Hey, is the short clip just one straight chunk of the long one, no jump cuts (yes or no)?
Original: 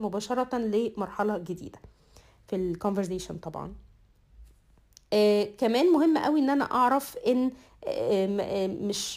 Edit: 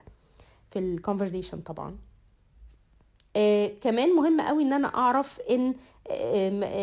yes